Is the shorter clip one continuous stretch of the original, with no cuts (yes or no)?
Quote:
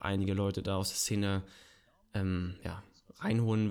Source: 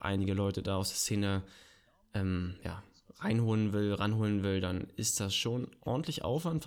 yes